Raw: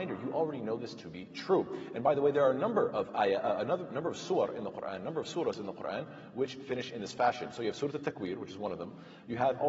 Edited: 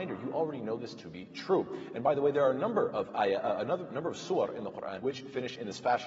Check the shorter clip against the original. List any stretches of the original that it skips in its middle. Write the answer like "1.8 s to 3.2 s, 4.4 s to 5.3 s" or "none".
5.0 s to 6.3 s